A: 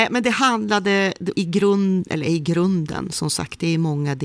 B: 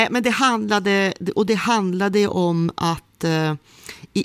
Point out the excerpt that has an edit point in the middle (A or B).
A